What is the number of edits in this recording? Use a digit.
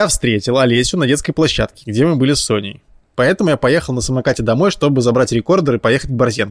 1